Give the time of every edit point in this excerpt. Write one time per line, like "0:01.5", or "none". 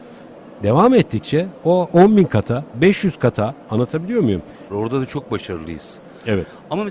0:02.7
0:04.7